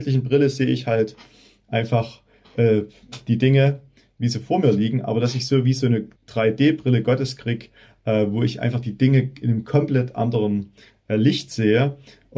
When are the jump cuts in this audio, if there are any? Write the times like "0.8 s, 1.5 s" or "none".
6.2 s